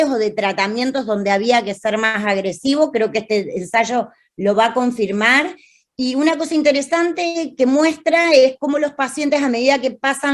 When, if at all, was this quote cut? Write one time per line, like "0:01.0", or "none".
none